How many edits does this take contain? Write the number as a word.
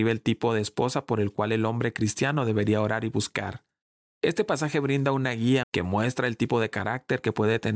one